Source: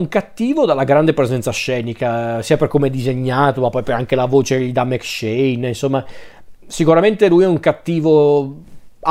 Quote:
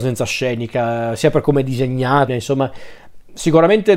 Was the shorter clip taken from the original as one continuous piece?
no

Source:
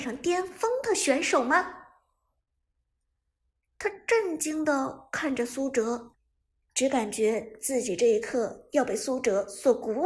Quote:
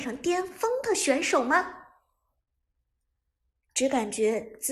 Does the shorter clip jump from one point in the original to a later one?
yes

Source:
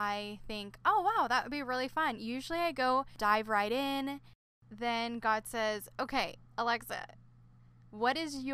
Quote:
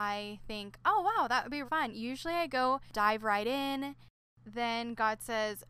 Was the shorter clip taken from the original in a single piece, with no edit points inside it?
no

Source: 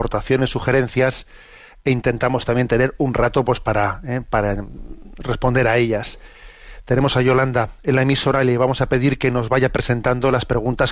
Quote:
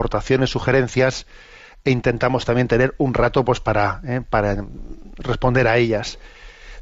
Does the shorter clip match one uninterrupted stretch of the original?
yes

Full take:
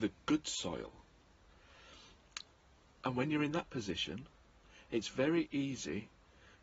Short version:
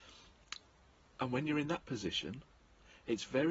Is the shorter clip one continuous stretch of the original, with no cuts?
yes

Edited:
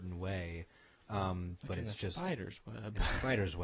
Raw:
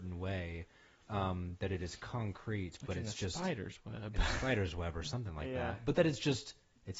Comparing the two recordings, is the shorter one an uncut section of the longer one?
no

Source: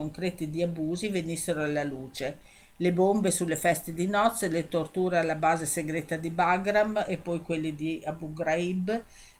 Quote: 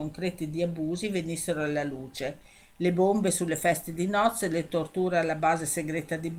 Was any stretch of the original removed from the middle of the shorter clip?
no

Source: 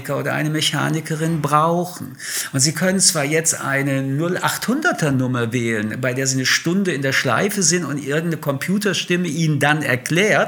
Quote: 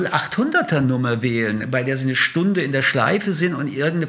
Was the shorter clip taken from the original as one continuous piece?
yes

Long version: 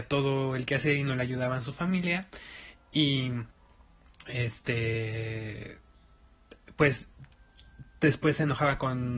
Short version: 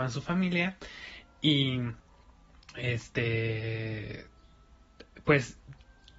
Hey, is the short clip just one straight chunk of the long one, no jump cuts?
yes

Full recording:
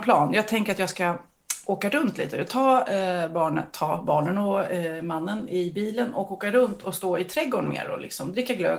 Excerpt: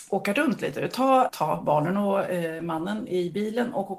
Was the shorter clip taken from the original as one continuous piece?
no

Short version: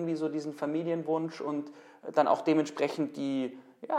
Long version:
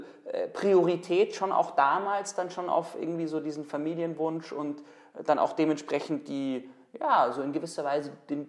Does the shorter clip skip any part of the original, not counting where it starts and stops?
no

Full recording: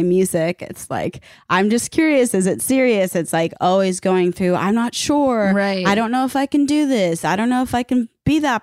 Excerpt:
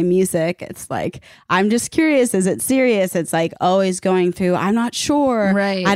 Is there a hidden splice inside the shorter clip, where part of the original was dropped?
no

